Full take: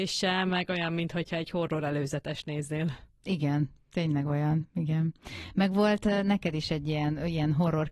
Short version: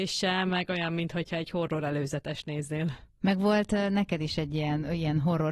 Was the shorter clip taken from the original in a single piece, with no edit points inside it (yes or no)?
no